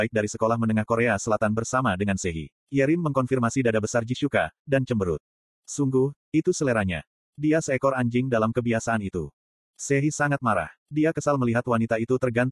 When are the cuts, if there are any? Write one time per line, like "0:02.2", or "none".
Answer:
0:02.6